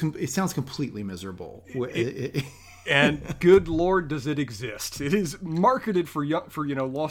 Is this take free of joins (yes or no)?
yes